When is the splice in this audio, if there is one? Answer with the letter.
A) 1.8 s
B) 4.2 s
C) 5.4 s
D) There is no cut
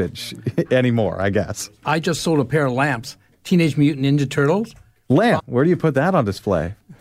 C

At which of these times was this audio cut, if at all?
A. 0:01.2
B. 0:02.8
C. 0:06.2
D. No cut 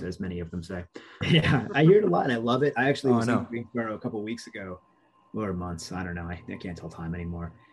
A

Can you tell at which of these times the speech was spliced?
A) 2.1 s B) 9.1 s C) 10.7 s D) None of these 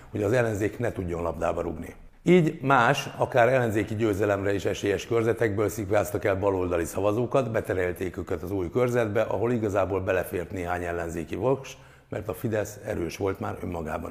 A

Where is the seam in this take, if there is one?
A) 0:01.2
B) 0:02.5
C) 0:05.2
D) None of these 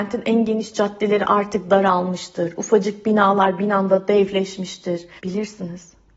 C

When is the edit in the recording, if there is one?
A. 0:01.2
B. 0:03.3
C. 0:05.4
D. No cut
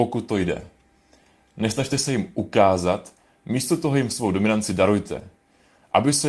D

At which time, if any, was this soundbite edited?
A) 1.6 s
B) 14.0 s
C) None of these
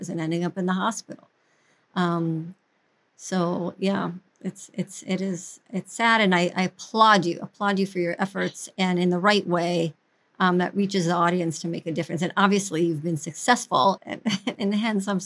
B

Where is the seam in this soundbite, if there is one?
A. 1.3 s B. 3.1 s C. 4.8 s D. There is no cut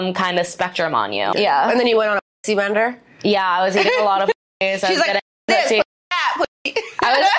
A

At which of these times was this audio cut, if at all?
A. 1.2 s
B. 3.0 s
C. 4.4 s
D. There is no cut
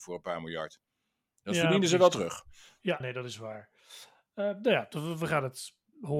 B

